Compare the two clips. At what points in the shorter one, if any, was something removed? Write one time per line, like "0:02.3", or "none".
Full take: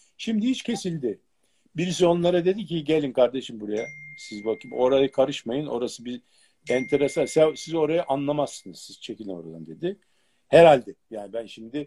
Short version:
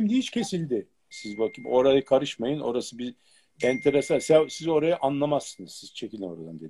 0:01.1